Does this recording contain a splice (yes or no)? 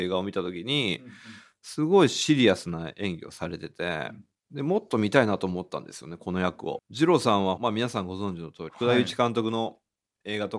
yes